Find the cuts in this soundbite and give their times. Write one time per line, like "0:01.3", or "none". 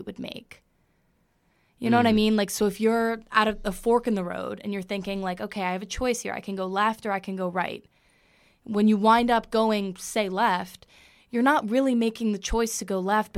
none